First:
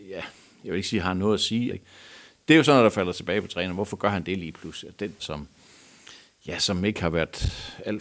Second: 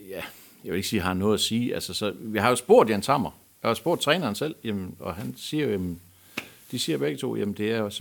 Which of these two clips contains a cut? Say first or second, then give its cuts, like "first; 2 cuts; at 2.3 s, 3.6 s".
first; 2 cuts; at 1.7 s, 5.2 s